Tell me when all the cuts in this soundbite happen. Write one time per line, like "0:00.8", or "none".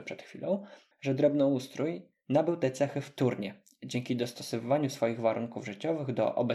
0:00.9